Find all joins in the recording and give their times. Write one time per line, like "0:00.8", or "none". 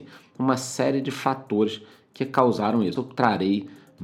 0:03.0